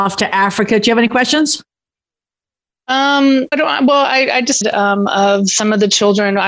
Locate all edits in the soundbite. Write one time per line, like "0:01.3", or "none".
0:03.5
0:04.6